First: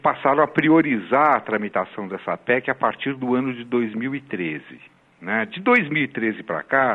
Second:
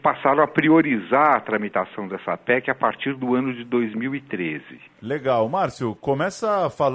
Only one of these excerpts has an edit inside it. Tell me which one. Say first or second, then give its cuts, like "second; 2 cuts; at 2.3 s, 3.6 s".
second; 1 cut; at 4.9 s